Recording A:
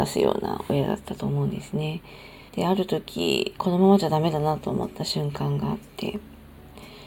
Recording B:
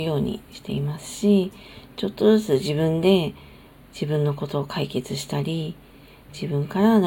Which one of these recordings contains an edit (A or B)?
A